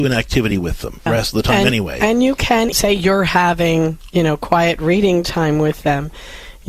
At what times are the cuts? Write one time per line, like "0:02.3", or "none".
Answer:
0:01.1
0:02.7